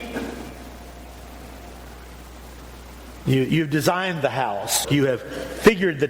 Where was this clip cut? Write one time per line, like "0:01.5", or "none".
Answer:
0:04.8